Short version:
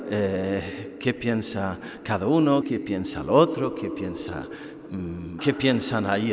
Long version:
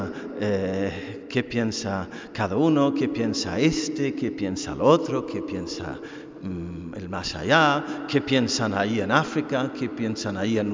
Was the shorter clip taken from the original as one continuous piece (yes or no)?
no